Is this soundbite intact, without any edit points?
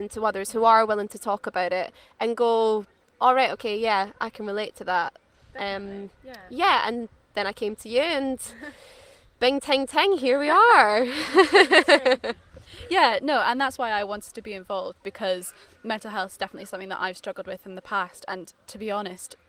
yes; 0 cuts

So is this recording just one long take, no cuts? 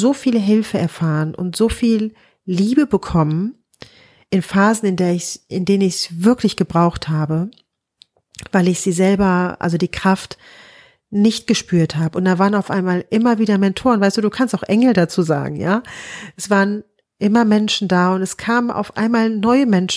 yes; 0 cuts

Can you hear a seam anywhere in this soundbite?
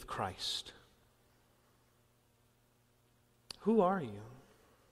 no; 0 cuts

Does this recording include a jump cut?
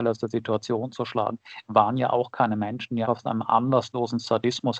yes; 1 cut; at 3.0 s

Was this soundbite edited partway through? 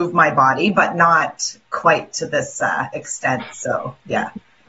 no; 0 cuts

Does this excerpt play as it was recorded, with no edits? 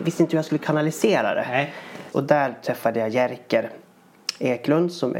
no; 1 cut; at 2.1 s

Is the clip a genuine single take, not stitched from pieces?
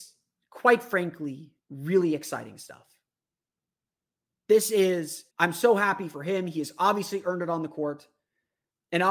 no; 2 cuts; at 1.6 s, 5.3 s

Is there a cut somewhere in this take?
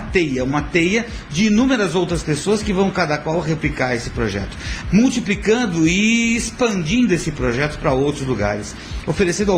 yes; 1 cut; at 4.8 s

